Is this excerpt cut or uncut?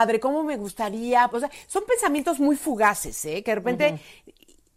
cut